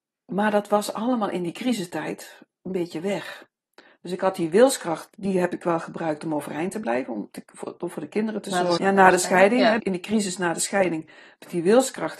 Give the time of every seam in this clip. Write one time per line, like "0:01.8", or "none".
0:08.8
0:09.8